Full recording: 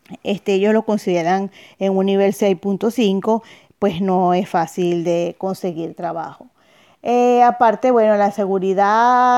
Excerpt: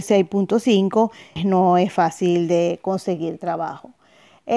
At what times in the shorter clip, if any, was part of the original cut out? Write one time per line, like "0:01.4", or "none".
0:01.4